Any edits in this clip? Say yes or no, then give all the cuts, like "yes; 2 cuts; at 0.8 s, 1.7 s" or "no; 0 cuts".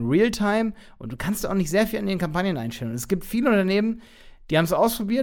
no; 0 cuts